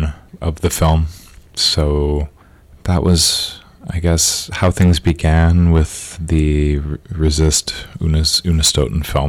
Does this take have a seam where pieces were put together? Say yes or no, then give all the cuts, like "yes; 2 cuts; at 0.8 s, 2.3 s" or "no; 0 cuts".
no; 0 cuts